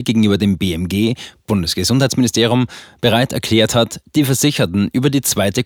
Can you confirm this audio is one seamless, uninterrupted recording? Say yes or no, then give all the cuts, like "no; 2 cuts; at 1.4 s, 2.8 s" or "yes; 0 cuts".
yes; 0 cuts